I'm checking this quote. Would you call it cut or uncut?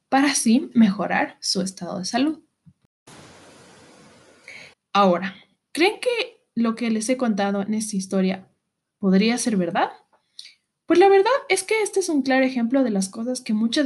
cut